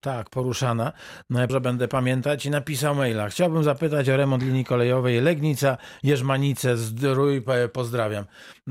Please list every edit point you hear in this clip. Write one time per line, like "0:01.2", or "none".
0:01.5